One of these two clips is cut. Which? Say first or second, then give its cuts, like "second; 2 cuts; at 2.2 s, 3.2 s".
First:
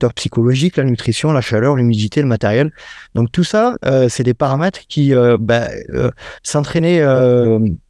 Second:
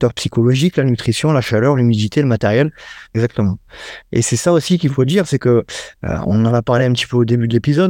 second; 1 cut; at 3.1 s